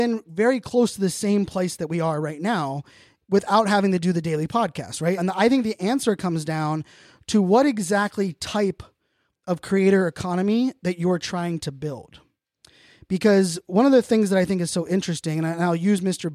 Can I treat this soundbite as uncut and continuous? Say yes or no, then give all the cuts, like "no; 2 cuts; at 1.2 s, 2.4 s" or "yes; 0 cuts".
no; 1 cut; at 5.2 s